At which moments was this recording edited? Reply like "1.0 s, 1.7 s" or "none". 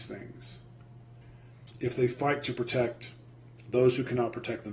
1.7 s